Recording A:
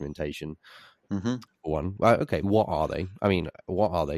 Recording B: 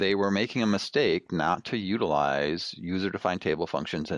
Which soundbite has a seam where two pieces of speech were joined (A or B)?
A